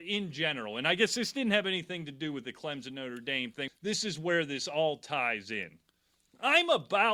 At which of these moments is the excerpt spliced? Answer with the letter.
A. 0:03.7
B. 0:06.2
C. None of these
A